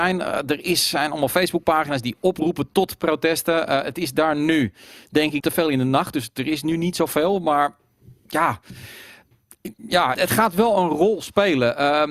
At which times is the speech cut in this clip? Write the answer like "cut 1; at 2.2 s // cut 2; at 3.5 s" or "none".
cut 1; at 5.4 s // cut 2; at 10.1 s